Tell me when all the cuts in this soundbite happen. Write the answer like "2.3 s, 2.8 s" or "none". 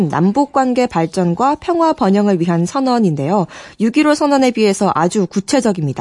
none